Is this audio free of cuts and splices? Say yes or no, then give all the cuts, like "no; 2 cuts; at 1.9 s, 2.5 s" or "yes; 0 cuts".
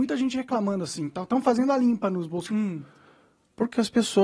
no; 1 cut; at 2.5 s